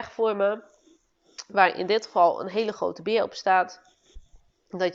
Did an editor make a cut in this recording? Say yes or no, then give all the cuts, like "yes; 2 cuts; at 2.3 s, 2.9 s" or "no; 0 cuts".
no; 0 cuts